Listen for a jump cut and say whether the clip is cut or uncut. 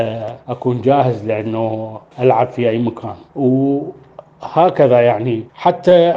cut